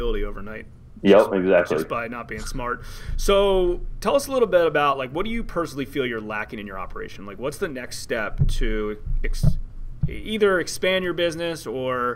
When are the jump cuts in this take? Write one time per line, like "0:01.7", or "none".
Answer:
none